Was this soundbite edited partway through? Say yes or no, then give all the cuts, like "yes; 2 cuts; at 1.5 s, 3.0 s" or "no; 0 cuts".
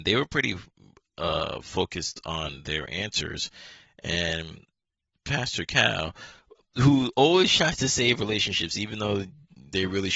no; 0 cuts